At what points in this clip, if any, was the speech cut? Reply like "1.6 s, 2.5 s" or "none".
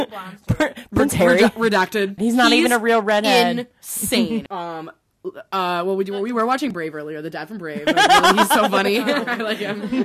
2.2 s, 4.5 s